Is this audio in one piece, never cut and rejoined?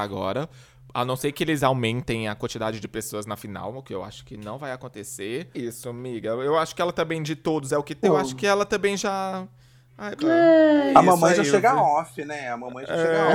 no; 3 cuts; at 5.5 s, 8.0 s, 10.2 s

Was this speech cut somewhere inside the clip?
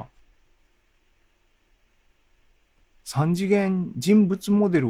no; 0 cuts

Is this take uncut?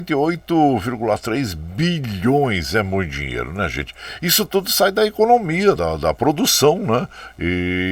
no; 1 cut; at 5.8 s

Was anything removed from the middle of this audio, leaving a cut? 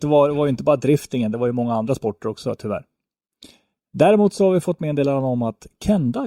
no; 0 cuts

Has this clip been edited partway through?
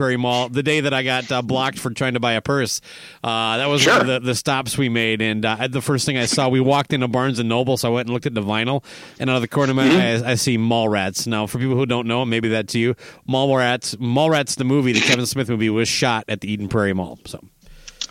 no; 0 cuts

